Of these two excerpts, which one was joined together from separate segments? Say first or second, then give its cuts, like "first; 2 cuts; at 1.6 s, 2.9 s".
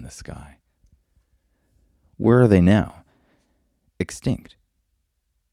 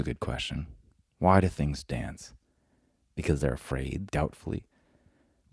second; 1 cut; at 4.1 s